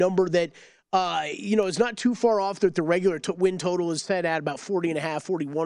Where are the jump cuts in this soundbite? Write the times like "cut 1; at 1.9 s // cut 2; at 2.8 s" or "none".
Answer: none

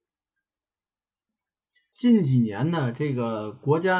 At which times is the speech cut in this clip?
cut 1; at 1.9 s

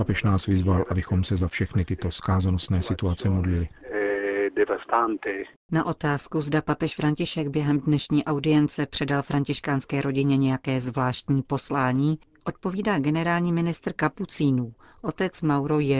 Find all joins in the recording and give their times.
none

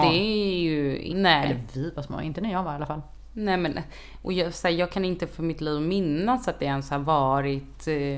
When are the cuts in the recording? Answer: cut 1; at 1.1 s

